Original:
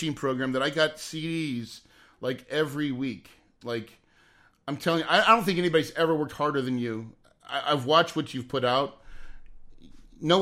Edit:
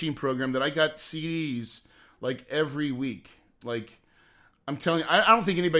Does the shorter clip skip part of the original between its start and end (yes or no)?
no